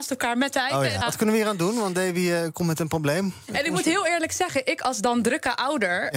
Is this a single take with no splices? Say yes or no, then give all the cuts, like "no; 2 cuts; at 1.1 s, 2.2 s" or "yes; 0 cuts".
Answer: no; 1 cut; at 1.0 s